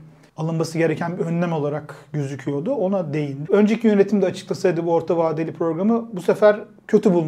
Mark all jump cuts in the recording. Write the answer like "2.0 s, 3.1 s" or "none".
3.4 s